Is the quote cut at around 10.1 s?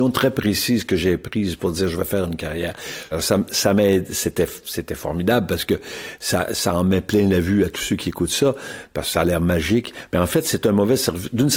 no; 1 cut; at 3.1 s

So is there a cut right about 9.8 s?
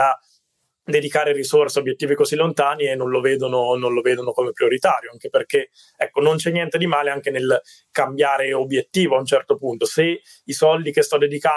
no; 0 cuts

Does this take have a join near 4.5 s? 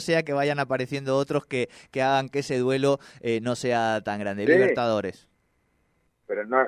yes; 1 cut; at 4.5 s

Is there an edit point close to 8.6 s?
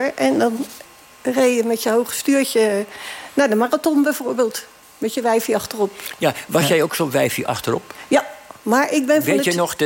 no; 0 cuts

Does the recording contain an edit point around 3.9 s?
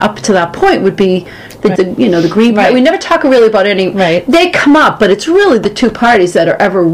no; 1 cut; at 1.8 s

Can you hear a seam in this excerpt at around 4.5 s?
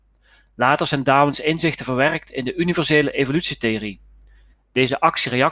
yes; 1 cut; at 4.5 s

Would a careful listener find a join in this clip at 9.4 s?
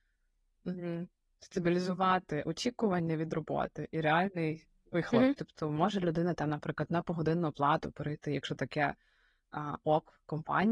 no; 1 cut; at 5.4 s

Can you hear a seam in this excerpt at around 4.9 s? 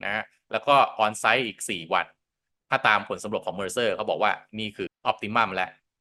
yes; 1 cut; at 4.9 s

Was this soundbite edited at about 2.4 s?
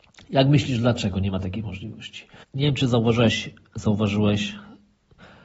yes; 1 cut; at 2.4 s

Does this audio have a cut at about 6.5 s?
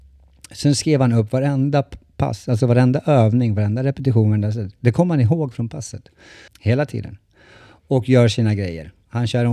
yes; 1 cut; at 6.5 s

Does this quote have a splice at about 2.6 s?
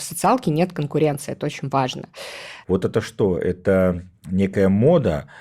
yes; 1 cut; at 2.6 s

